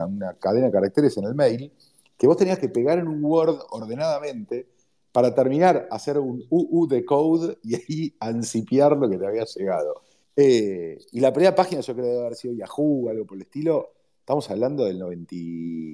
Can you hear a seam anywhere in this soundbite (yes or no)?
yes